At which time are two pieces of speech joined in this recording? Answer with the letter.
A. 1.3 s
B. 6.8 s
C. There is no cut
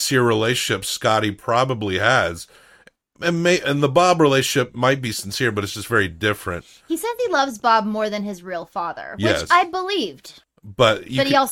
C